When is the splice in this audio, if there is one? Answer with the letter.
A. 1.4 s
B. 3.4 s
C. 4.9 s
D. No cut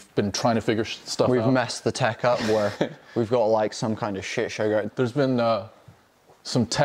C